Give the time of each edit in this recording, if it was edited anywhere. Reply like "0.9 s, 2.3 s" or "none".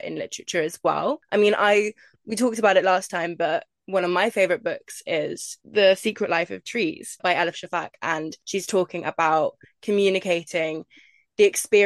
7.2 s